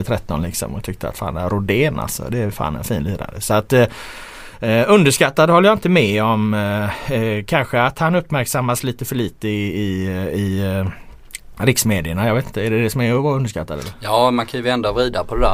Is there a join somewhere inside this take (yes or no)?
no